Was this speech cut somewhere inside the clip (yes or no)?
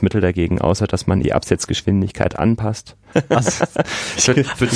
yes